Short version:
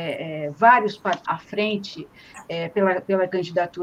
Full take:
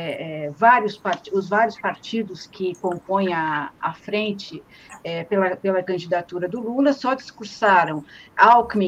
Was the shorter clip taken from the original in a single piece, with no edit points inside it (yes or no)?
no